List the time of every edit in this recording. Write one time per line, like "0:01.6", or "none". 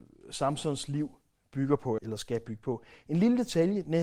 0:02.0